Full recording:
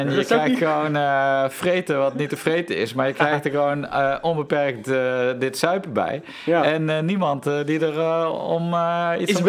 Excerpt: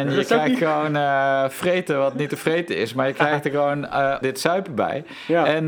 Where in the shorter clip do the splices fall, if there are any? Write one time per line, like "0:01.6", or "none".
0:04.2